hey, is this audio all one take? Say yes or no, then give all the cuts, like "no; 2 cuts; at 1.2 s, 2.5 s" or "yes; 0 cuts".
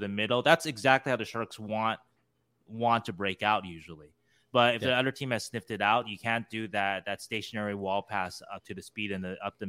yes; 0 cuts